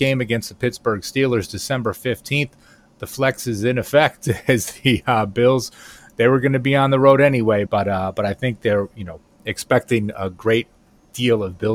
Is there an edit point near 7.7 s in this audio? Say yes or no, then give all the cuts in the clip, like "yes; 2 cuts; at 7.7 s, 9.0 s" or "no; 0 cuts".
yes; 1 cut; at 7.7 s